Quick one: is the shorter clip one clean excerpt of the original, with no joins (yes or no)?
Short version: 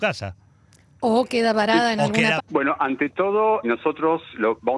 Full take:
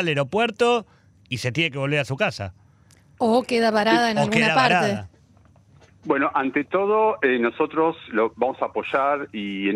no